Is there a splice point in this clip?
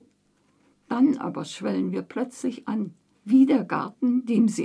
yes; 1 cut; at 3.1 s

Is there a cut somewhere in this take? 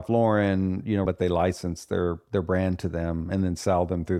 yes; 1 cut; at 1.1 s

